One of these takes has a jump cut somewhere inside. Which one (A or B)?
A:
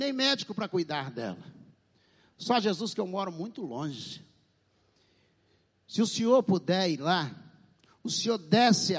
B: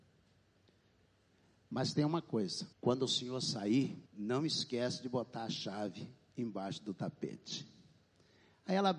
B